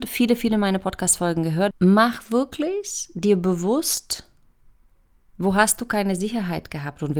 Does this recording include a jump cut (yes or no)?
yes